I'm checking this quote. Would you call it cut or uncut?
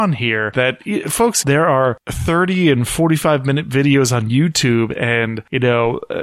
cut